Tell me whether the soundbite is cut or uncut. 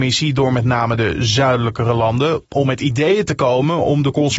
uncut